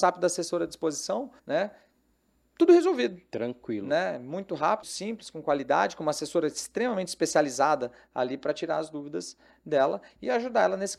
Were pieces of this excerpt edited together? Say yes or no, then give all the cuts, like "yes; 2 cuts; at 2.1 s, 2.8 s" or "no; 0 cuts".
yes; 2 cuts; at 1.4 s, 4.8 s